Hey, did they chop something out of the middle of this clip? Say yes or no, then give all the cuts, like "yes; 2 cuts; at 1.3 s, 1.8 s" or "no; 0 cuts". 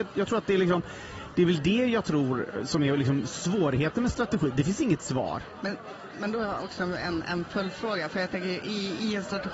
no; 0 cuts